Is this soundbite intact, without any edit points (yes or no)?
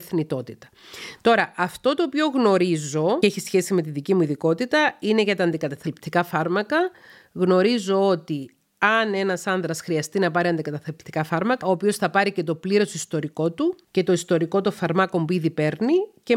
no